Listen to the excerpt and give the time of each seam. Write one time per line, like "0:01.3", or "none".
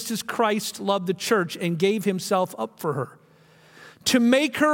none